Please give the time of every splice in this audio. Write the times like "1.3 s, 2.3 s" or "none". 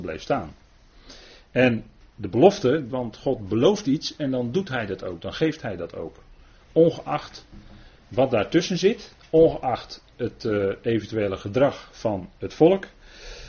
2.9 s